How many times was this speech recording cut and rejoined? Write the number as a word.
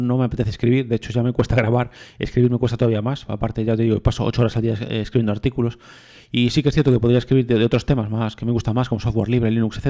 zero